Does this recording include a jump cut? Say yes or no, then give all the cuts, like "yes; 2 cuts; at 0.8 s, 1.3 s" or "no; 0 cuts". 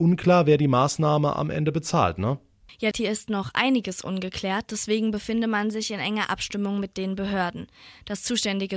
yes; 1 cut; at 2.9 s